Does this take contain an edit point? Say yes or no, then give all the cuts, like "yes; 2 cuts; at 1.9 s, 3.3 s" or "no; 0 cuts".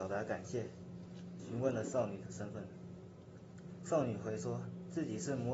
yes; 1 cut; at 1.4 s